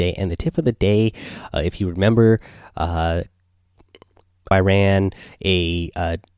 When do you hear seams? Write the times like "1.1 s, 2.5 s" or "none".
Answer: 4.5 s